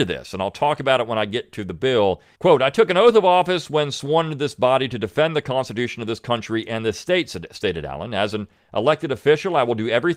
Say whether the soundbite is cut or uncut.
cut